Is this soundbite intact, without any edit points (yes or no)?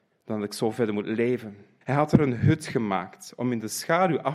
no